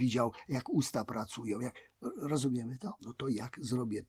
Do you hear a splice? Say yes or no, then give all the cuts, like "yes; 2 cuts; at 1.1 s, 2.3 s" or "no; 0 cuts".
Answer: yes; 1 cut; at 3.0 s